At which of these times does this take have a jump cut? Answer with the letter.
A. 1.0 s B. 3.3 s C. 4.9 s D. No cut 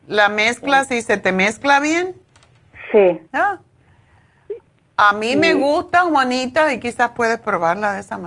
B